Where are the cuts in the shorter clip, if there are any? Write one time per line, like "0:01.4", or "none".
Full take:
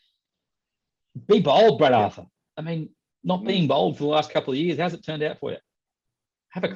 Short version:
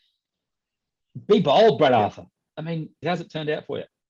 0:03.0